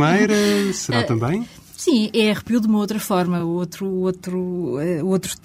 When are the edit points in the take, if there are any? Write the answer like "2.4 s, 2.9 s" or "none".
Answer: none